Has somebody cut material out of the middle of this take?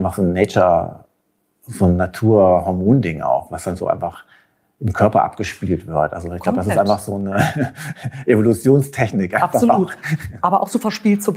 no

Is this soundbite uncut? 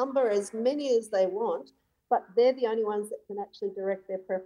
no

